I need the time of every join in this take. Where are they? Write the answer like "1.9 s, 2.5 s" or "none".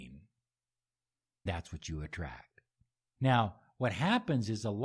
1.5 s, 3.2 s

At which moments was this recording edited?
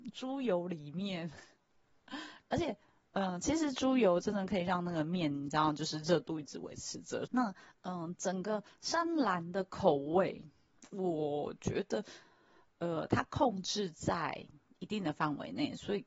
7.3 s

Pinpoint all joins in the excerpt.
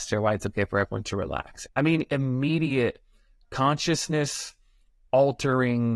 1.7 s

